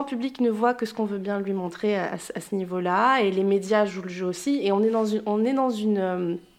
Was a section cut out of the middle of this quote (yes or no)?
no